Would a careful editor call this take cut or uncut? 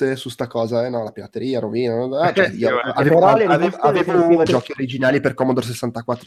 cut